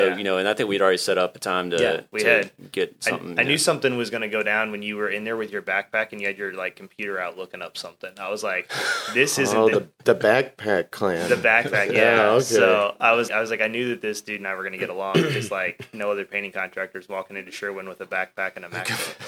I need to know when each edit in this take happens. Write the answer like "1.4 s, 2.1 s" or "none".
13.3 s